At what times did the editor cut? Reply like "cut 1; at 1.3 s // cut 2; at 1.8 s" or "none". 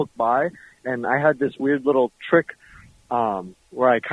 none